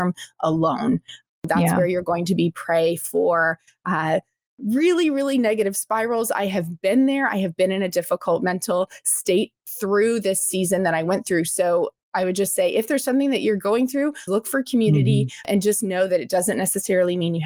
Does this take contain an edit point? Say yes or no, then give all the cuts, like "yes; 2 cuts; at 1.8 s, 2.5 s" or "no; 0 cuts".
yes; 1 cut; at 14.3 s